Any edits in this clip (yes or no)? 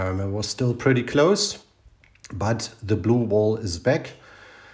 no